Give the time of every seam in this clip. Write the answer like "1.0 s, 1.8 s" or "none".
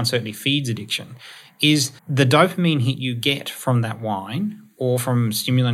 2.0 s

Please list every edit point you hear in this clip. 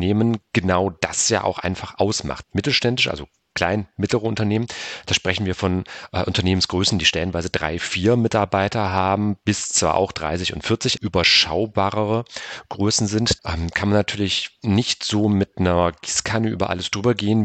2.4 s, 11.0 s, 13.4 s

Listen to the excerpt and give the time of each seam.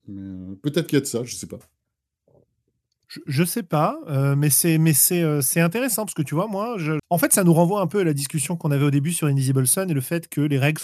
7.0 s

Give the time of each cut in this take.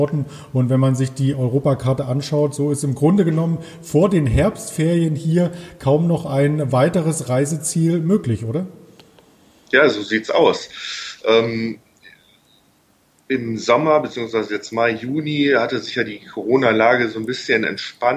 none

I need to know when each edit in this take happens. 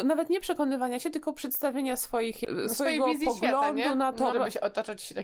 4.3 s

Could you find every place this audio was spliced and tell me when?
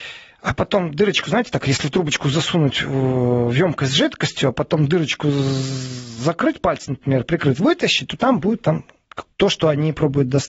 9.3 s

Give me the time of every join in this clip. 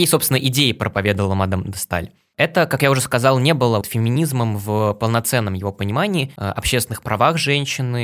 3.8 s, 6.4 s

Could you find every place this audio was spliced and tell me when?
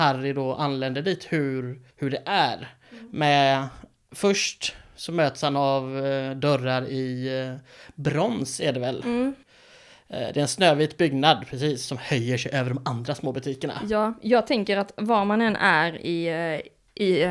1.9 s

